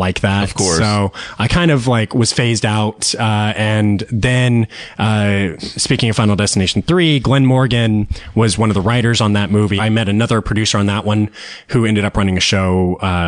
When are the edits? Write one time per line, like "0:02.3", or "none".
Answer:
0:09.8